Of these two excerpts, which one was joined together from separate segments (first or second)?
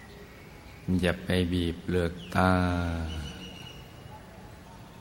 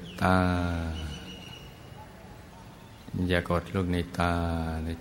second